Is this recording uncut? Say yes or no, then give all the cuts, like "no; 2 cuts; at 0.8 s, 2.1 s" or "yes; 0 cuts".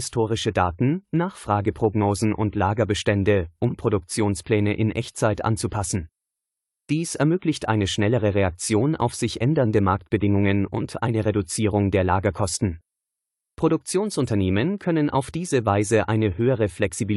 yes; 0 cuts